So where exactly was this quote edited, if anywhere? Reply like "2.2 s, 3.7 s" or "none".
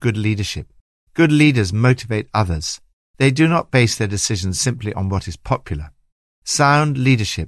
none